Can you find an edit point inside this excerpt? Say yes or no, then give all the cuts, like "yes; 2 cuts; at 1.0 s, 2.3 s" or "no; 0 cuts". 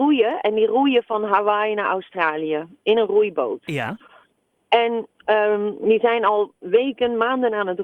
no; 0 cuts